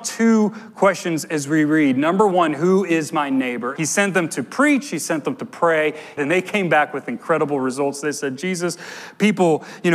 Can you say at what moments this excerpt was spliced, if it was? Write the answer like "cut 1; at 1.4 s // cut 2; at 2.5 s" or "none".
cut 1; at 3.8 s // cut 2; at 6.2 s